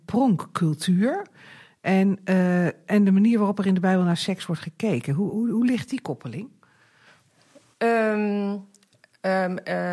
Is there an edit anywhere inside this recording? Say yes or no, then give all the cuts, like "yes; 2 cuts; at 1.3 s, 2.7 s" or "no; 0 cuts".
yes; 1 cut; at 5.3 s